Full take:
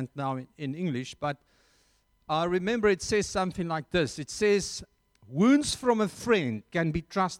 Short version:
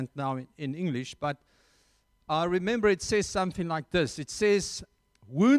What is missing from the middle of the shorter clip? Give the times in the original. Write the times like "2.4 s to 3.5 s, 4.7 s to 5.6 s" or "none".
none

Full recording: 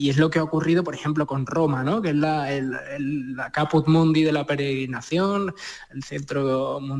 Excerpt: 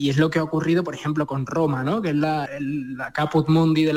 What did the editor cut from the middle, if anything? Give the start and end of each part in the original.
2.5 s to 2.8 s

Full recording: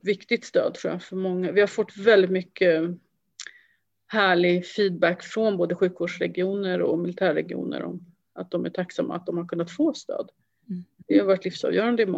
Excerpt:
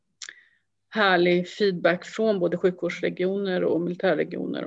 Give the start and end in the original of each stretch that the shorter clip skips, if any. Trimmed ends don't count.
none

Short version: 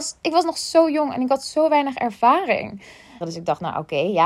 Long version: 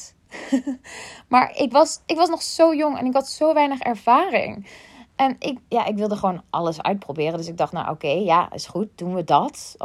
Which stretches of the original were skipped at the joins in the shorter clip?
5.1 s to 7.3 s

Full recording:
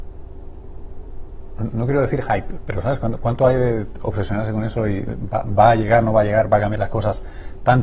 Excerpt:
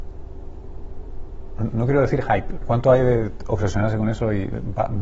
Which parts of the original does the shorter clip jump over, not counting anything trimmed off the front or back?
2.6 s to 3.2 s

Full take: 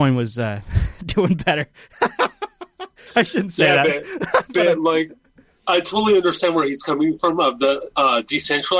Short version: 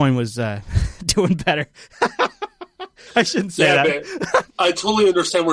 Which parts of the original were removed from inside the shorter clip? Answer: 4.5 s to 5.6 s

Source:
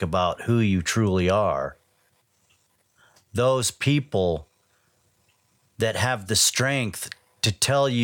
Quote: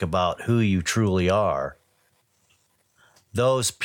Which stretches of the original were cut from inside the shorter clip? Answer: none

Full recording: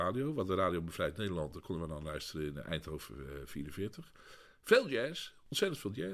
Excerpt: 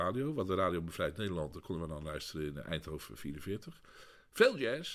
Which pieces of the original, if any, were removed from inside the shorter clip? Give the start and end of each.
3.1 s to 3.5 s

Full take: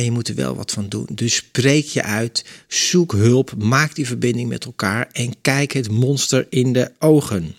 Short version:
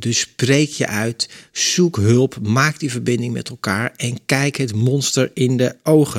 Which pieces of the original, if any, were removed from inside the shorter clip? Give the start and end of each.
none

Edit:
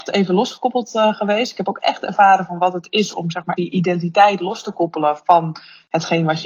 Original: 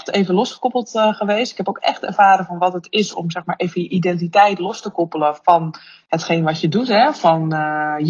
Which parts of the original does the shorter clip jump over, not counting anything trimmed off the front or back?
3.6 s to 3.7 s

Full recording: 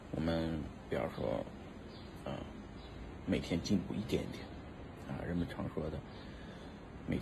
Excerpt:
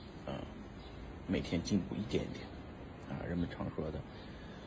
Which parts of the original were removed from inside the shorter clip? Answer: none

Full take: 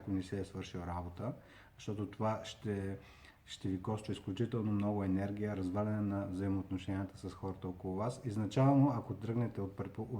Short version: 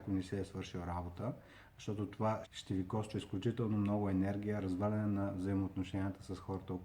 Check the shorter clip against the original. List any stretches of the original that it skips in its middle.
2.4 s to 3.4 s

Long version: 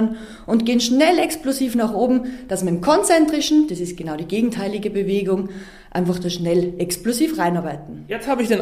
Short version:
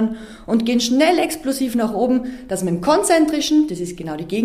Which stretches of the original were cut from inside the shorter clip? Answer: none

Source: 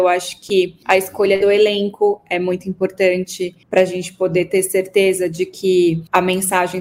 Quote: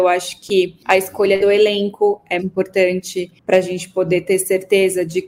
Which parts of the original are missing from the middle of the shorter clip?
2.4 s to 2.6 s

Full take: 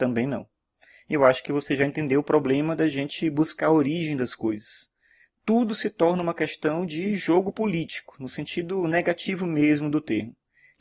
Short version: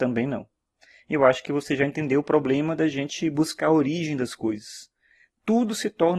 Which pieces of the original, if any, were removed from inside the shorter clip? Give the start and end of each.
none

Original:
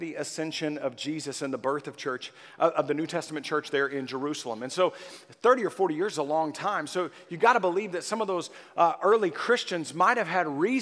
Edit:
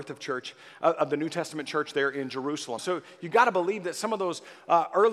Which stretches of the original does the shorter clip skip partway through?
4.6 s to 6.9 s

